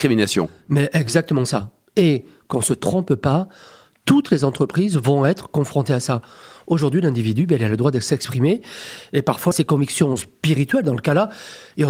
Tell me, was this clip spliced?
yes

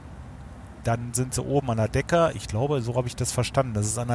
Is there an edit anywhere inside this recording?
no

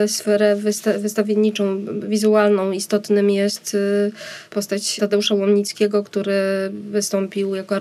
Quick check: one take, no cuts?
yes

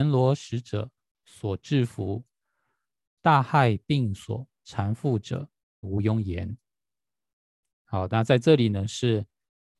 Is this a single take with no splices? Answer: no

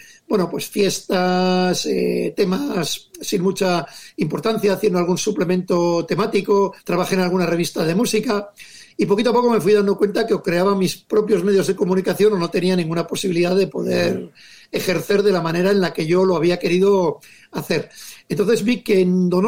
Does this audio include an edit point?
yes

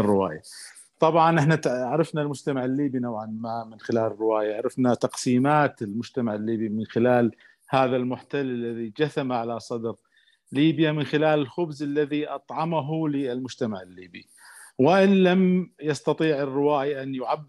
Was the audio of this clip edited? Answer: no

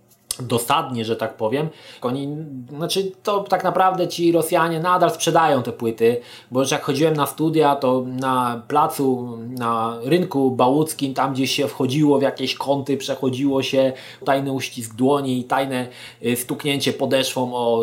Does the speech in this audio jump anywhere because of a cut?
yes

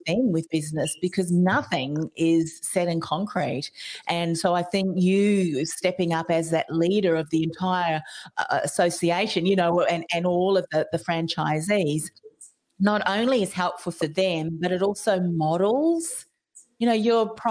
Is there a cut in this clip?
no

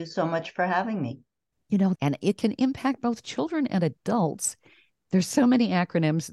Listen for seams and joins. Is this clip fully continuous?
no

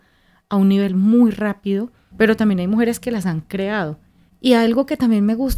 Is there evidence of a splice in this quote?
yes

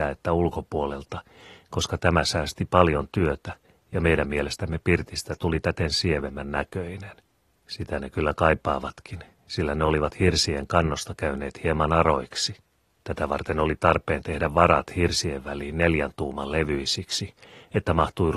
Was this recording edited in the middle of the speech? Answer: yes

